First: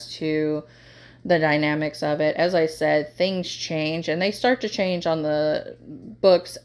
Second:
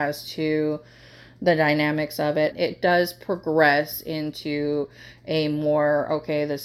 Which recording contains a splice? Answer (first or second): second